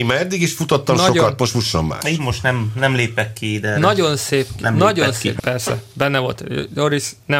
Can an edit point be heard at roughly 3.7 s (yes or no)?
no